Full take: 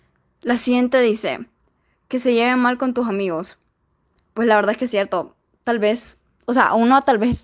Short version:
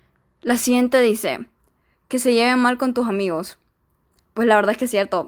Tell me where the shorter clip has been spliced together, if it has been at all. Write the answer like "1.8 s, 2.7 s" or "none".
none